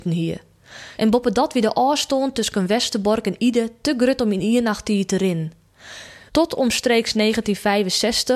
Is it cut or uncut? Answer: cut